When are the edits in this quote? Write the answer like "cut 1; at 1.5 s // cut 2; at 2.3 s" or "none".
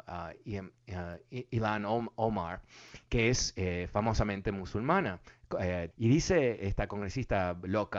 cut 1; at 5.9 s